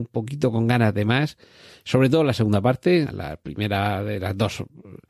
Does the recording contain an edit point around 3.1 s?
yes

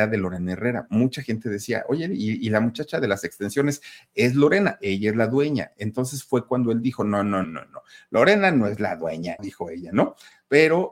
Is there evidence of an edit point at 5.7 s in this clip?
no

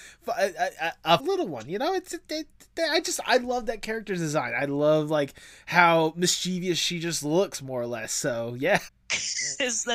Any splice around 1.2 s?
yes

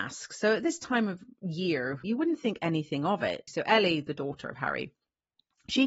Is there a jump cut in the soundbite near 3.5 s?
yes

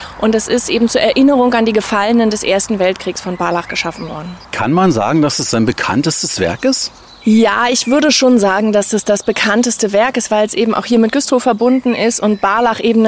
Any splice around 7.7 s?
no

